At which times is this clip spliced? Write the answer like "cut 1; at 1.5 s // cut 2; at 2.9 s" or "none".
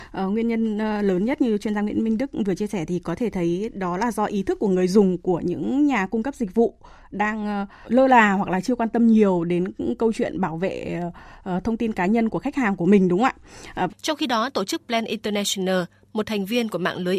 cut 1; at 7.8 s // cut 2; at 13.9 s